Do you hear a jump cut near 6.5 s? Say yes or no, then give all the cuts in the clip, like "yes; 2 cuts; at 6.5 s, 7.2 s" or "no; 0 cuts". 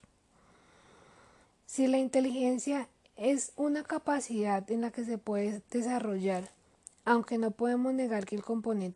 no; 1 cut; at 1.4 s